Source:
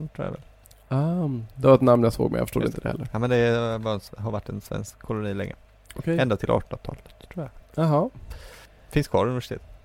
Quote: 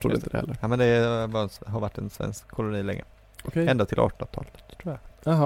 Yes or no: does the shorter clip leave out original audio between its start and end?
no